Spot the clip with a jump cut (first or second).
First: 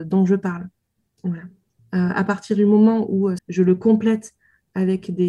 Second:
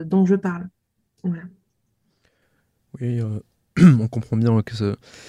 first